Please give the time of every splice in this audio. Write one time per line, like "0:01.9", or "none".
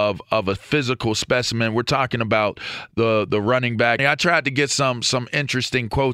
0:04.0